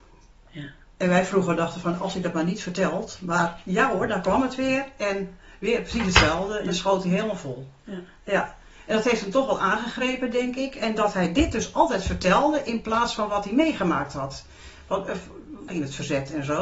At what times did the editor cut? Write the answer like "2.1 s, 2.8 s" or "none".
15.7 s